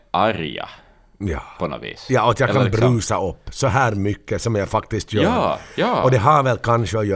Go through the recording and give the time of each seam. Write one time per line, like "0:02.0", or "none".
none